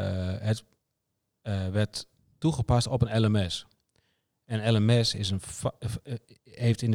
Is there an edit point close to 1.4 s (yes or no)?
no